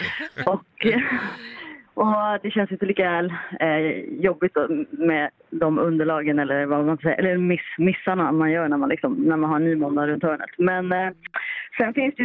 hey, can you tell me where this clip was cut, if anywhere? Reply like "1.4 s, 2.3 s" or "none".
none